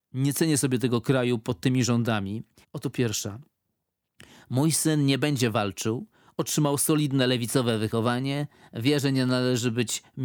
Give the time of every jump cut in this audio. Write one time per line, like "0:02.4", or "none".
0:02.6